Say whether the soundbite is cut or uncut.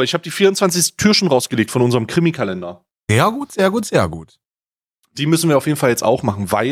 uncut